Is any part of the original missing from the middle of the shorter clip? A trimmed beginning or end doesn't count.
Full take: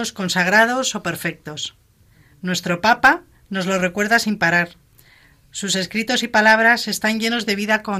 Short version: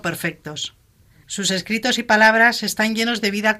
yes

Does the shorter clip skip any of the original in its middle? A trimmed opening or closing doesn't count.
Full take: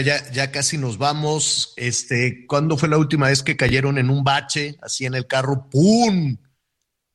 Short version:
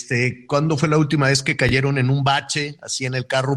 no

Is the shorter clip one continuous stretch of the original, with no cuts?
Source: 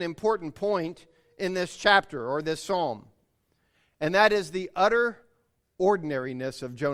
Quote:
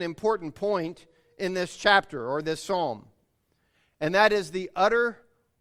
yes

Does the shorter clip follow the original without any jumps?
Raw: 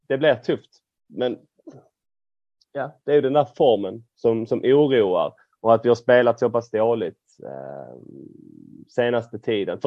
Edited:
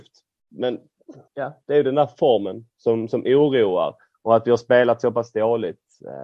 no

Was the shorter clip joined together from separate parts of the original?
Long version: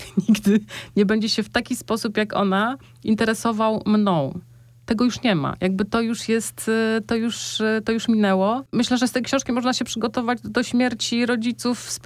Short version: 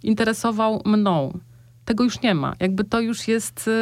no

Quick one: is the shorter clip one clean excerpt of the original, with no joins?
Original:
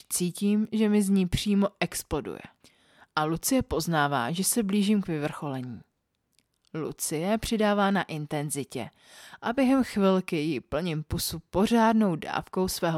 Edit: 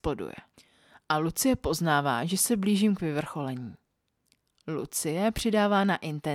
yes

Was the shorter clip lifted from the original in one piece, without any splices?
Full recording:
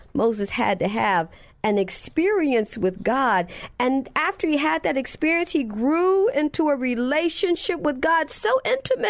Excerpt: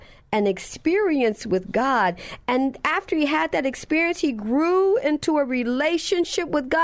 yes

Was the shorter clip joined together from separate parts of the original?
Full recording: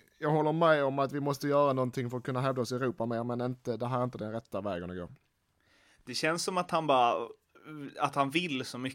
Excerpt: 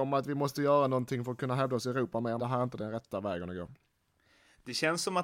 yes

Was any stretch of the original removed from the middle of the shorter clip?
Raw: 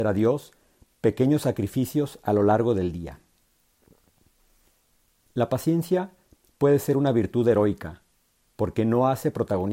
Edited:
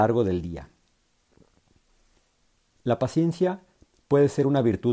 no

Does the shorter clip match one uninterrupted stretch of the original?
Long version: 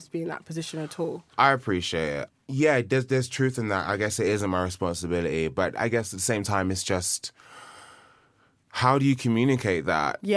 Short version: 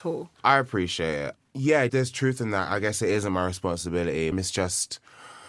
no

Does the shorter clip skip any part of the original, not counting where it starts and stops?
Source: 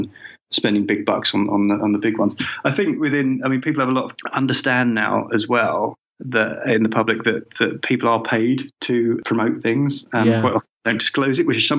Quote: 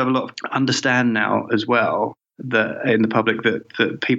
no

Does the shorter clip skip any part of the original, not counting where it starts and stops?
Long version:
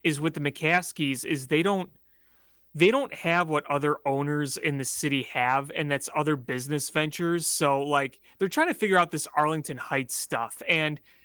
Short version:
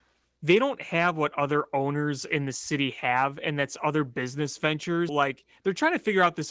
yes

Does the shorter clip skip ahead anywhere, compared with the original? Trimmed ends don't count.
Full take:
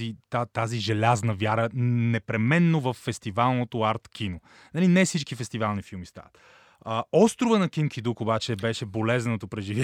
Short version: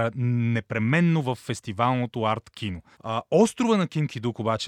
yes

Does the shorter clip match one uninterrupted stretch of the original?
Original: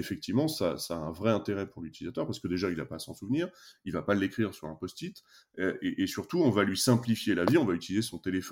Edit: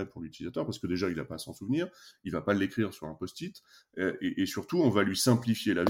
yes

